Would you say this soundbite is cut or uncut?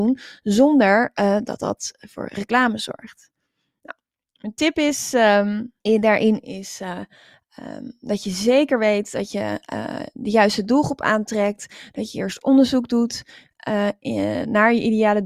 cut